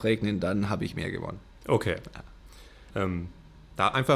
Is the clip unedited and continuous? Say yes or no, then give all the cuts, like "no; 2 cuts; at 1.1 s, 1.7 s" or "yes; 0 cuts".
no; 1 cut; at 2.9 s